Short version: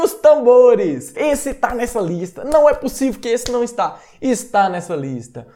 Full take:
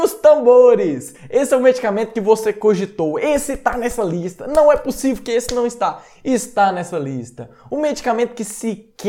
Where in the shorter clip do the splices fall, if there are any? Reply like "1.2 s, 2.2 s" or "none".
1.2 s